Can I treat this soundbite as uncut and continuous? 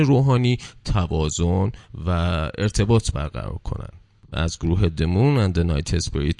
no; 1 cut; at 4.3 s

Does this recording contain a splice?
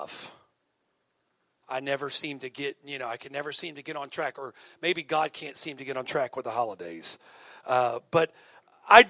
no; 0 cuts

